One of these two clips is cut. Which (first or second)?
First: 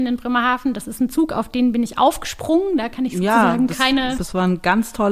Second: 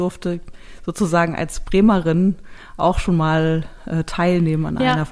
first